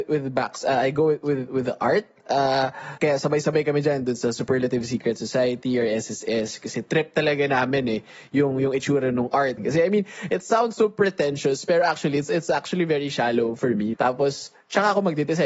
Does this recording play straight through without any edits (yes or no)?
no